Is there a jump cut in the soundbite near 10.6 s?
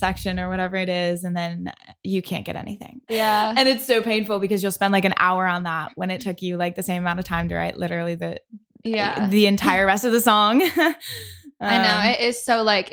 no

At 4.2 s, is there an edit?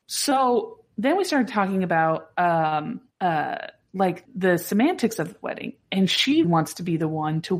yes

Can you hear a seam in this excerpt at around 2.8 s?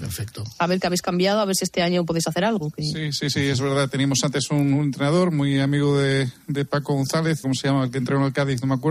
no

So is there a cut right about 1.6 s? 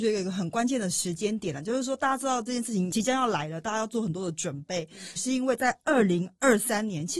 no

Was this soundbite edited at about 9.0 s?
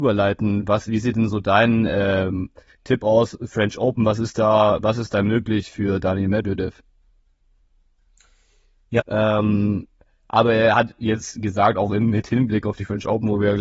yes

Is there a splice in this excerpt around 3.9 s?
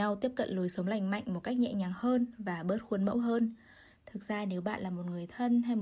yes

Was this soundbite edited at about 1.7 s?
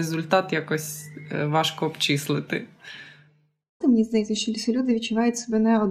no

